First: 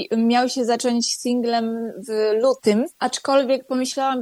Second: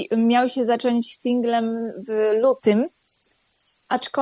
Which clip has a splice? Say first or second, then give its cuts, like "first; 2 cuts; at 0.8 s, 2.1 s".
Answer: first; 1 cut; at 2.9 s